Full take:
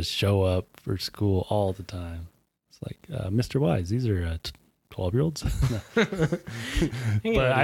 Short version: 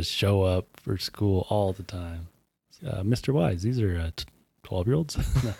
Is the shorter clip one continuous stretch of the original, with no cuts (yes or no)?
no